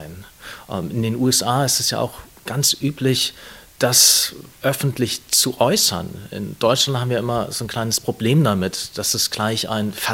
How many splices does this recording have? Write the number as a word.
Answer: one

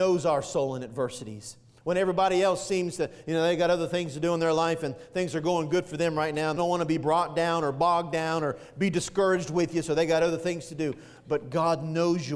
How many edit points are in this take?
one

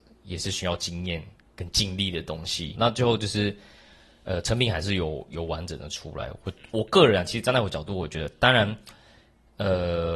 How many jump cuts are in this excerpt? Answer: zero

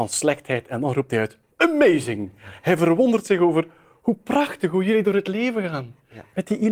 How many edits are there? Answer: zero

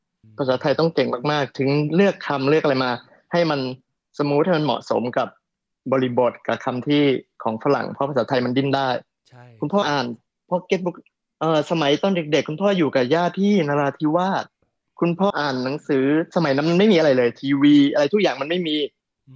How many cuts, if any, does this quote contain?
two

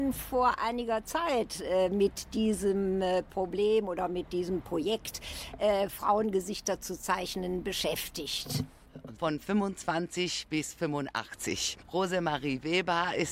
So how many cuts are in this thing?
one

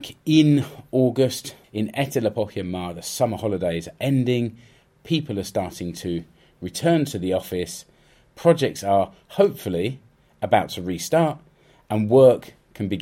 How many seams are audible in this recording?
one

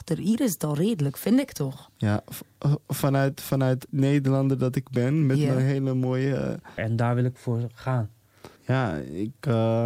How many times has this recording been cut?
two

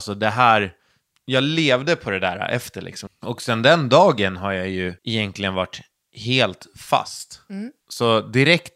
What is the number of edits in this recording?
three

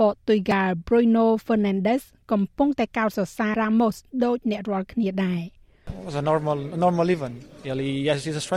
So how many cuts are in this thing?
one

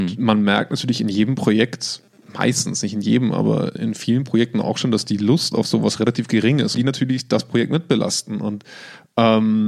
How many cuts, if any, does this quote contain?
two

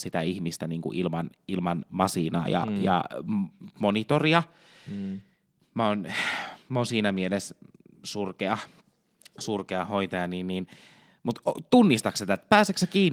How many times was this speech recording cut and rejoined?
zero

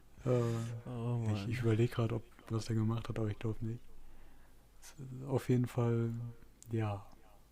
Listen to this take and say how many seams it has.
one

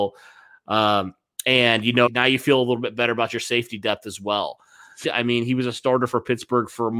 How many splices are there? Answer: two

